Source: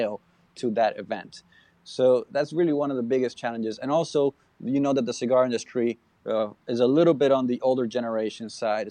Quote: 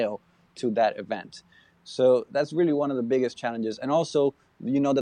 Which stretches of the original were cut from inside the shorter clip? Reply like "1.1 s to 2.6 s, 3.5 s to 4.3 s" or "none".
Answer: none